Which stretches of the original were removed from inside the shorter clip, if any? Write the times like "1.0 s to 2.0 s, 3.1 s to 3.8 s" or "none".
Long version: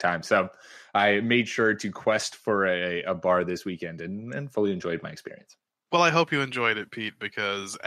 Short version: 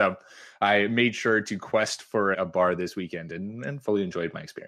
2.7 s to 3.0 s